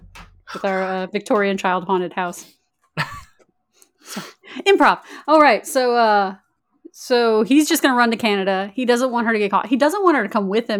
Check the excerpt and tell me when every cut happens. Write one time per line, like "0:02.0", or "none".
none

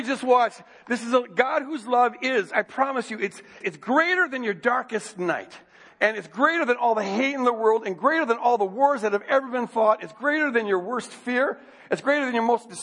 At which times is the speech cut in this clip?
0:03.6

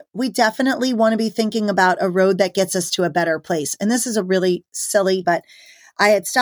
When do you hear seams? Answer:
0:05.2

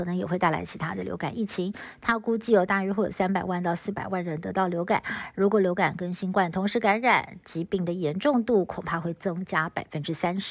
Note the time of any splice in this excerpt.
0:02.0

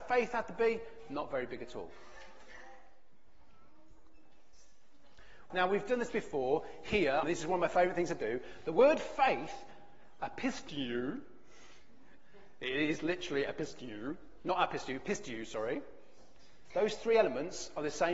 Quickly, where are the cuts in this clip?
0:05.5
0:07.2
0:16.7

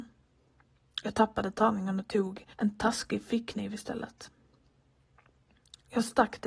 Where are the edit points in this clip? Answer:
0:02.5

